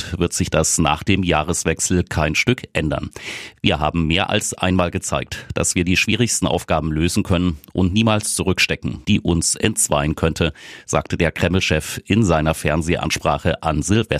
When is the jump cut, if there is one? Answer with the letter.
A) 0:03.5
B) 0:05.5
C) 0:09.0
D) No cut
C